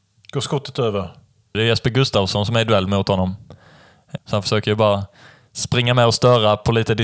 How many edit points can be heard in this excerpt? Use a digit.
2